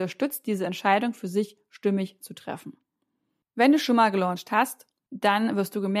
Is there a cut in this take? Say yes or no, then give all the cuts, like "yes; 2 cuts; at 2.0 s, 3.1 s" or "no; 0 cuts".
no; 0 cuts